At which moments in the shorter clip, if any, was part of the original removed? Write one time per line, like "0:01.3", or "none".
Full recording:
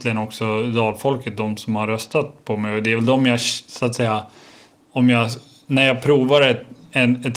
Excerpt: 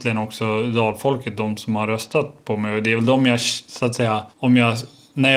0:04.3